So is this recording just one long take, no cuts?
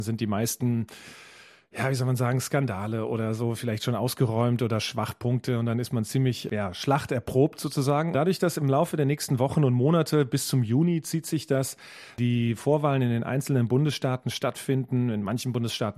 no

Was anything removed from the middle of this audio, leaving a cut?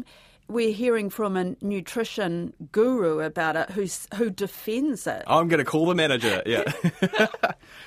yes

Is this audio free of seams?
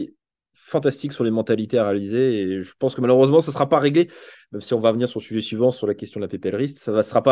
yes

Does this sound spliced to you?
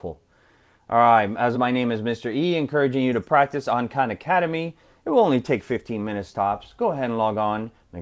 yes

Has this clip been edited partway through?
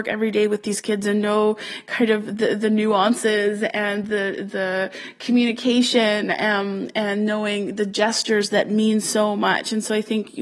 no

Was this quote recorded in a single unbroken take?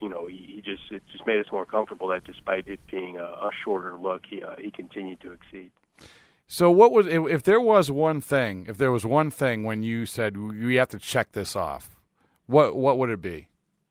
yes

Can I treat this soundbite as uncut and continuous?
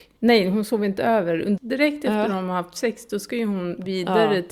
no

